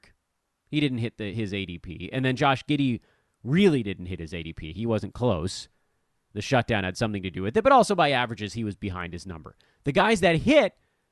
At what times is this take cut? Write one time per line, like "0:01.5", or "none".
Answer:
none